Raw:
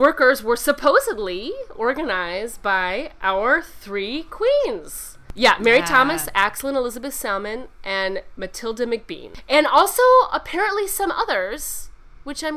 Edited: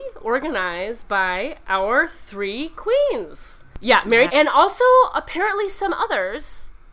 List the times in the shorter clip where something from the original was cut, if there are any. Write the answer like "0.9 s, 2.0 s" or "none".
4.3 s